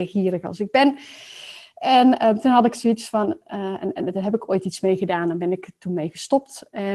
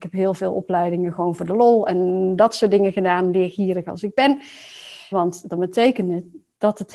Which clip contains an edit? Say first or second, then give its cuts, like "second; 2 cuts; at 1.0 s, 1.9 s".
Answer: second; 1 cut; at 5.1 s